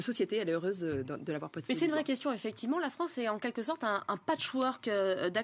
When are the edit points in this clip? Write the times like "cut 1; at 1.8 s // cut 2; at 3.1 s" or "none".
none